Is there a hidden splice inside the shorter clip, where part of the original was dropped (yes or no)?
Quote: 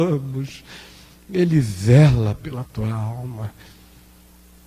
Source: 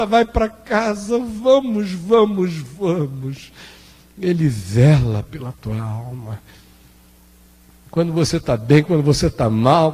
no